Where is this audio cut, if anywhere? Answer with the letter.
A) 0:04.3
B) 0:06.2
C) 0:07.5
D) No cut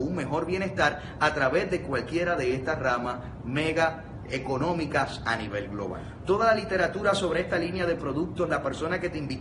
A